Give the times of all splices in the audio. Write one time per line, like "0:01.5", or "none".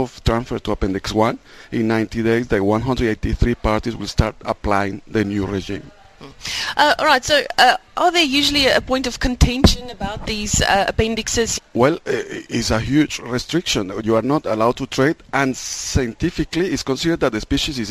0:11.6